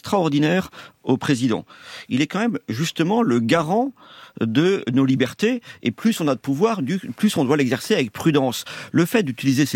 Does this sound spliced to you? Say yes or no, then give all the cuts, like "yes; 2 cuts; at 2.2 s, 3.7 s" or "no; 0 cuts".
no; 0 cuts